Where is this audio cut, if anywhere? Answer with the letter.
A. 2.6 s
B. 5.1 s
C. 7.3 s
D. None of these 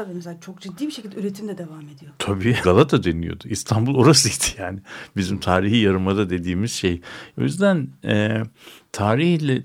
A